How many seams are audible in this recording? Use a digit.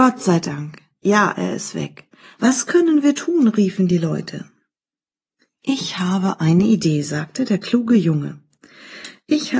1